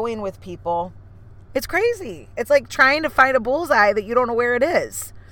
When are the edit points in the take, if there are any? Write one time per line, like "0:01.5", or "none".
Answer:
0:01.4